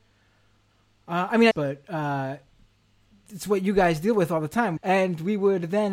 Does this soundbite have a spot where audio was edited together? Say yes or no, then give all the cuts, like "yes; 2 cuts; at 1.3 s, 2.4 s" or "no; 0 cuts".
yes; 2 cuts; at 1.5 s, 4.8 s